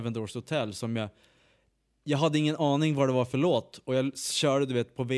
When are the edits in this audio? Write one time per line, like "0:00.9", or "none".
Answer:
none